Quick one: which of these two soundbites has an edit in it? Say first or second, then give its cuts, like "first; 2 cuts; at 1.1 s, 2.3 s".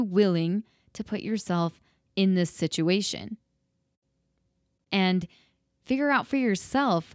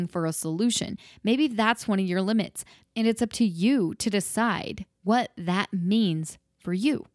second; 2 cuts; at 2.8 s, 4.9 s